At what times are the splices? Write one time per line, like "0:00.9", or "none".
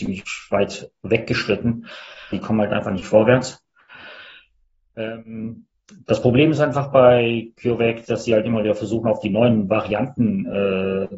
0:02.3